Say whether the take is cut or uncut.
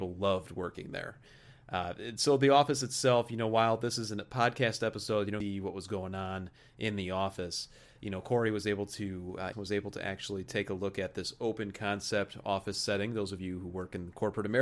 cut